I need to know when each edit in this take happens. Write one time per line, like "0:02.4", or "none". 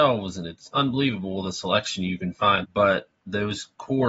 0:02.6